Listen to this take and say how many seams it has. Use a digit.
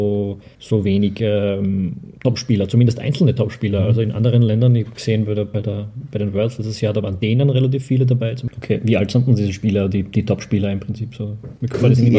1